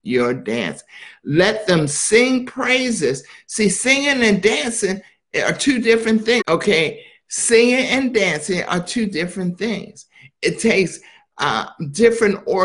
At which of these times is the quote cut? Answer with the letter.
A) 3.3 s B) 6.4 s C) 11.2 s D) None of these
B